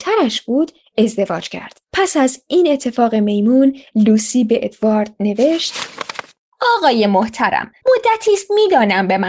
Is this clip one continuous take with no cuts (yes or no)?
no